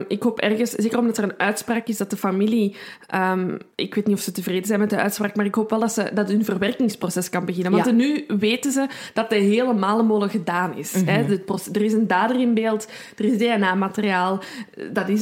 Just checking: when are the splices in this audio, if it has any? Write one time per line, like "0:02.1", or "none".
0:03.7